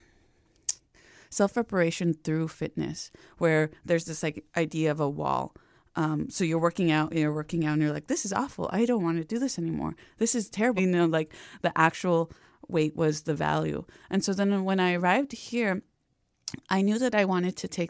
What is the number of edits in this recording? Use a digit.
1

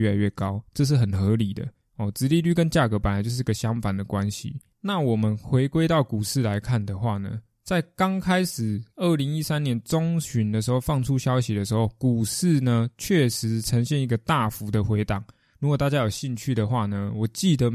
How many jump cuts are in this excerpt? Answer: 0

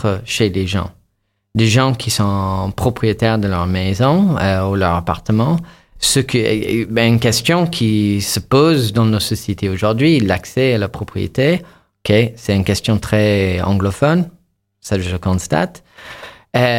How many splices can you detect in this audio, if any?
0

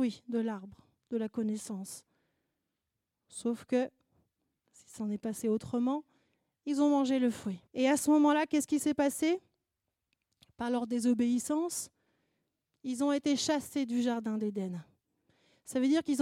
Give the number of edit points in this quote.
1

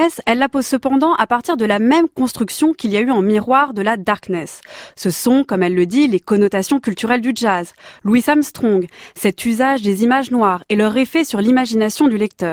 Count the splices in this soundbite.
0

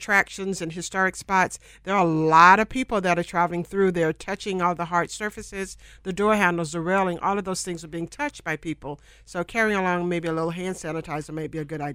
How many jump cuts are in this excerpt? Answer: 0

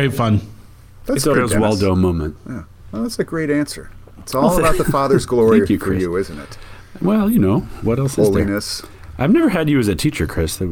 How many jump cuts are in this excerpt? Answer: 2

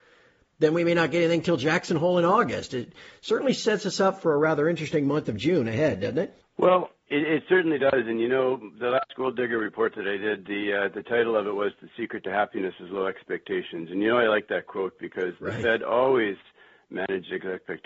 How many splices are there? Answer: 0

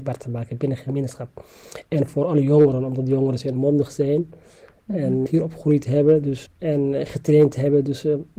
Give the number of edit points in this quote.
2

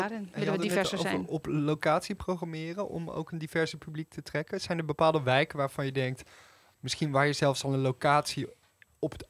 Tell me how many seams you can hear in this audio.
0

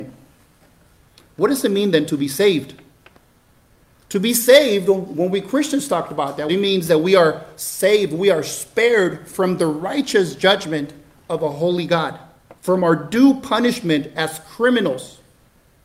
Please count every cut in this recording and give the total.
2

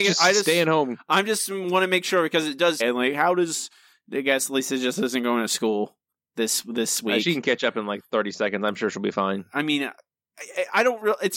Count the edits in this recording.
1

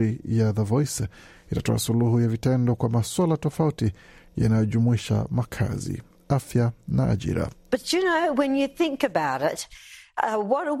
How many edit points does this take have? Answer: 1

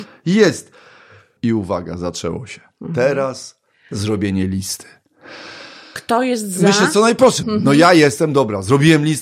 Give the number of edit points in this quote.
2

